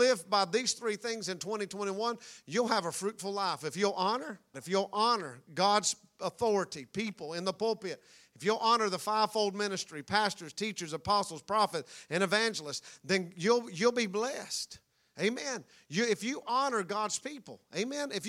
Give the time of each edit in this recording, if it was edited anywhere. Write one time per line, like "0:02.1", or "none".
0:04.5